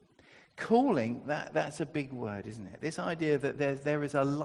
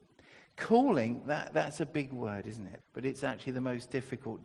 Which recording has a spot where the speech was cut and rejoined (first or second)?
second